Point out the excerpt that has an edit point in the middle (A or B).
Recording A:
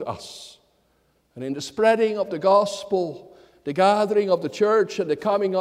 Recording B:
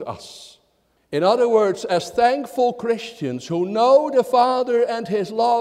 B